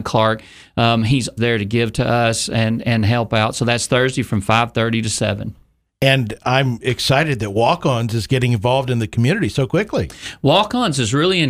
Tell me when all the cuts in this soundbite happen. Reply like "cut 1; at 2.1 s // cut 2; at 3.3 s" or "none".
cut 1; at 1.4 s